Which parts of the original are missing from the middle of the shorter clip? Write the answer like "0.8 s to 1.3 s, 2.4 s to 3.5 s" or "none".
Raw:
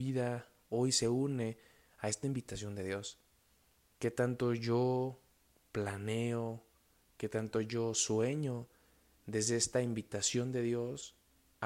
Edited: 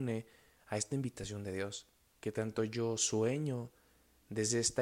3.5 s to 7.1 s